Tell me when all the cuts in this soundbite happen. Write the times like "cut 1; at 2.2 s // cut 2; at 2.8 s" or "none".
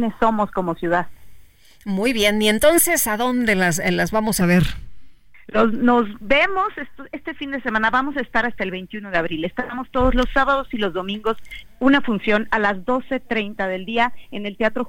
none